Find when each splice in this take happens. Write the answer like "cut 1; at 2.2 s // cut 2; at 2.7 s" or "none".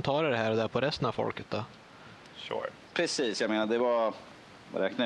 cut 1; at 2.9 s